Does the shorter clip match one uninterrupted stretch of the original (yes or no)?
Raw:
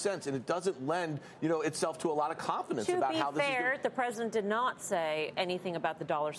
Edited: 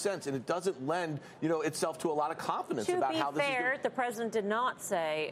yes